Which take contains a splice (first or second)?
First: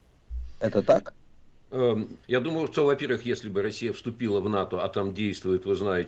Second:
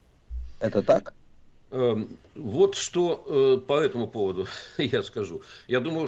first